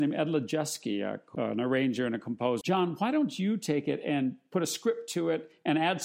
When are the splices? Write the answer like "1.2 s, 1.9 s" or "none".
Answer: 1.4 s, 2.6 s